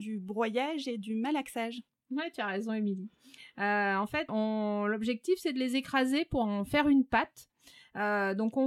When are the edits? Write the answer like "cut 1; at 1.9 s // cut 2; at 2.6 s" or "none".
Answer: cut 1; at 4.3 s